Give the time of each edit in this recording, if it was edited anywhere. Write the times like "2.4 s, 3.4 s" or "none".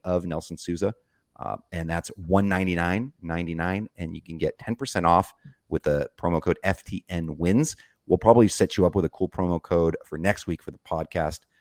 none